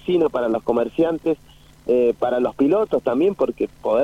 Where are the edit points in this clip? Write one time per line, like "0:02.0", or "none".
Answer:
none